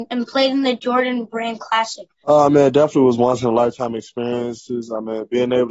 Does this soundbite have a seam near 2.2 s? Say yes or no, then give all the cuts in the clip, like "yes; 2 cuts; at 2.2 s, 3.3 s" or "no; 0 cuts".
yes; 1 cut; at 2.2 s